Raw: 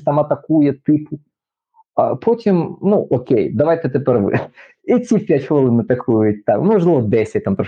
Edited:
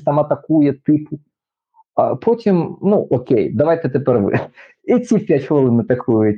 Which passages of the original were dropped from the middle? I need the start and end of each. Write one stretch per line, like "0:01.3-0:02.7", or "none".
none